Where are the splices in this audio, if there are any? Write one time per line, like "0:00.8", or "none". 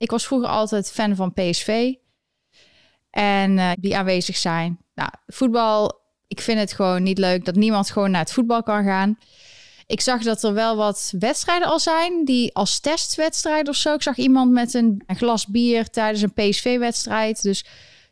0:03.7
0:15.1